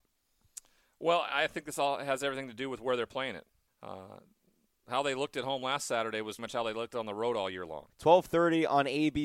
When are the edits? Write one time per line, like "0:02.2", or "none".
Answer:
0:03.7
0:06.4
0:07.9